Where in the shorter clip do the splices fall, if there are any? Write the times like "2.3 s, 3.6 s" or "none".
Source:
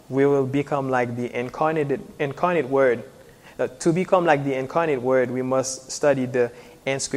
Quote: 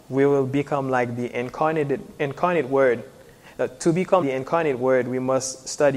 4.2 s

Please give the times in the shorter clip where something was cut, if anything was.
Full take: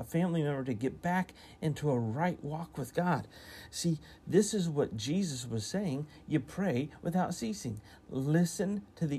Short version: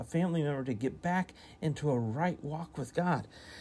none

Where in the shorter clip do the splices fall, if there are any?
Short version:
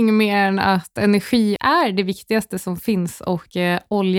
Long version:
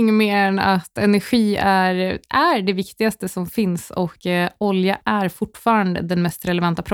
1.6 s

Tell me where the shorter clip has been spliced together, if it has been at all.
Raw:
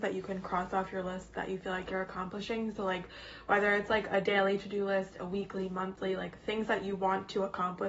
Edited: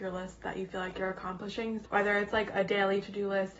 1.9 s

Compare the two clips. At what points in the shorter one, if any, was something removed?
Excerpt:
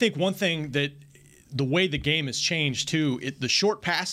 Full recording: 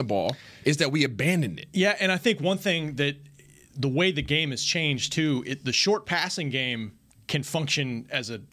none

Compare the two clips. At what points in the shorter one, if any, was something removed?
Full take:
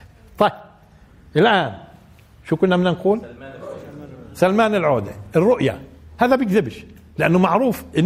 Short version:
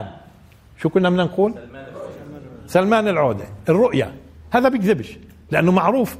none

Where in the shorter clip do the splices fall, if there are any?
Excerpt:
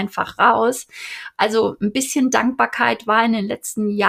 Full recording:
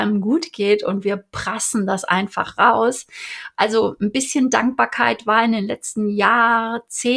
none

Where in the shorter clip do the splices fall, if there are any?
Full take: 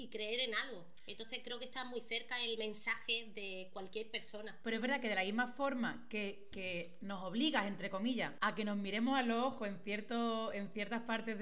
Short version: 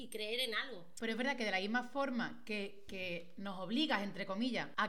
1.0 s

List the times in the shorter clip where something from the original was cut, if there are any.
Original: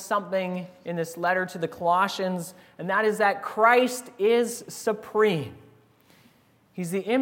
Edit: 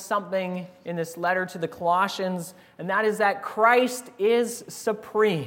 none

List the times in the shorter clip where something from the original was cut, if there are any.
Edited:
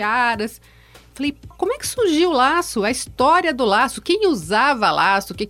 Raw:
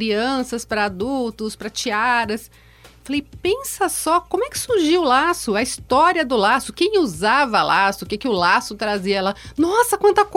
1.5 s

